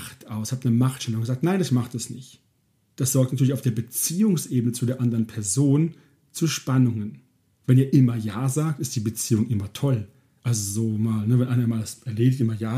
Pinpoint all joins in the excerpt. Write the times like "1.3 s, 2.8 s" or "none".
none